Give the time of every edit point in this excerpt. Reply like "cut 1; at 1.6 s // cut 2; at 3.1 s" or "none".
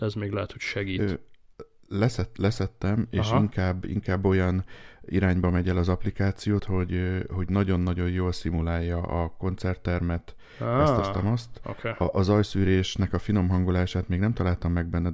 cut 1; at 6.6 s